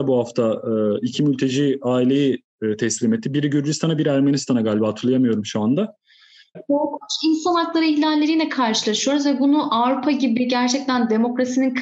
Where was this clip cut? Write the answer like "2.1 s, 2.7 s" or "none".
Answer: 6.5 s